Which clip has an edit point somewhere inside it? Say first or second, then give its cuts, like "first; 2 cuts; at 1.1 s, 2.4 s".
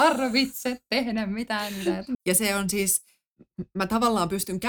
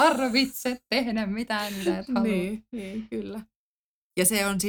first; 1 cut; at 2.1 s